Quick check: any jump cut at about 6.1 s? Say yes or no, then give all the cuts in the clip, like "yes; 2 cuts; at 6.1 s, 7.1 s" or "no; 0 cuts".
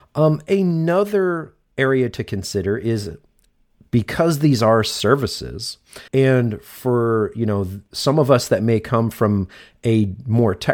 yes; 1 cut; at 6.1 s